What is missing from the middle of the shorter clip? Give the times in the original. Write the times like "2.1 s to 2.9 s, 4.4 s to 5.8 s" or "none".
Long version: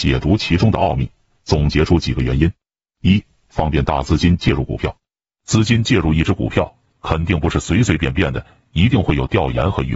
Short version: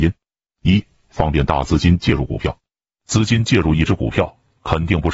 none